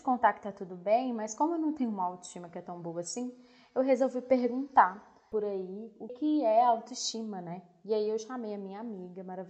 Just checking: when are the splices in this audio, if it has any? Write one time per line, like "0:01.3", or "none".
0:06.1